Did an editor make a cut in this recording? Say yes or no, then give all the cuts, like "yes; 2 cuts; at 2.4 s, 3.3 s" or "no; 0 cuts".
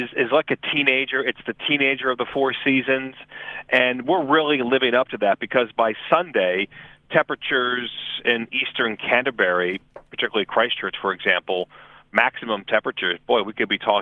no; 0 cuts